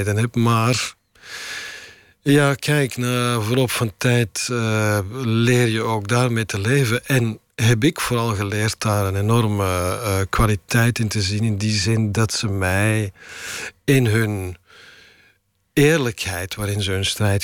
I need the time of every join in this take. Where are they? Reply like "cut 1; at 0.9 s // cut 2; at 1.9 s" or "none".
none

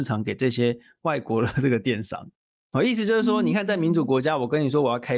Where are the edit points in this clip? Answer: none

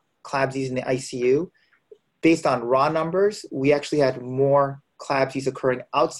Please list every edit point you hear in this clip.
none

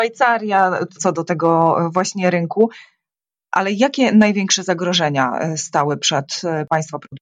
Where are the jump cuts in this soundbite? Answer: cut 1; at 1.0 s

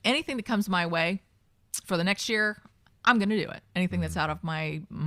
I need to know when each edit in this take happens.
none

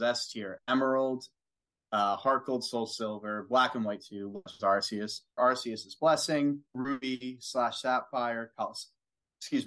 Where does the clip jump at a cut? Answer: cut 1; at 5.4 s // cut 2; at 6.7 s

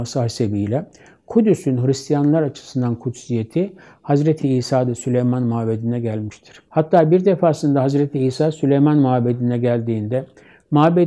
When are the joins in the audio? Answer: cut 1; at 4.4 s // cut 2; at 6.7 s

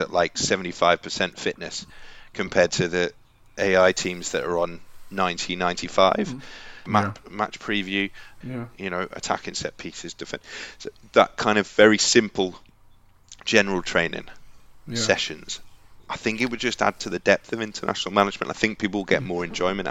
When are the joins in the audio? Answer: cut 1; at 6.9 s // cut 2; at 8.4 s

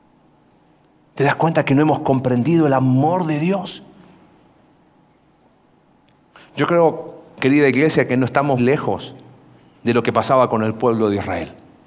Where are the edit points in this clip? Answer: cut 1; at 8.6 s

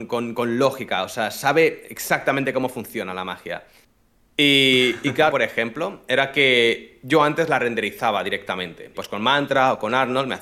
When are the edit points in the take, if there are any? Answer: cut 1; at 5.3 s // cut 2; at 8.9 s

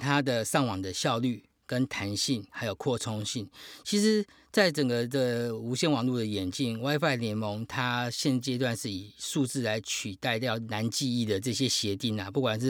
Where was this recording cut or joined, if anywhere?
none

